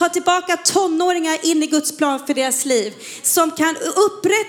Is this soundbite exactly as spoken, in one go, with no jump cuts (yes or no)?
yes